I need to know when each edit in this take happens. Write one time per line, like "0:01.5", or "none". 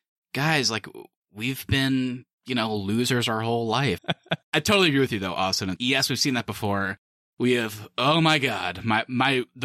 0:04.0
0:05.8